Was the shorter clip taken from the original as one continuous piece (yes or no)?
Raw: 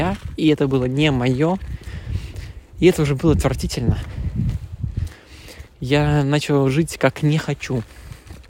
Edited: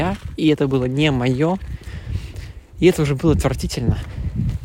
yes